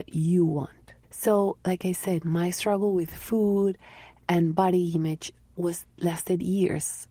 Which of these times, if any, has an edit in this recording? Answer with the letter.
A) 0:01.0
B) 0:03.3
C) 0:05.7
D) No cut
A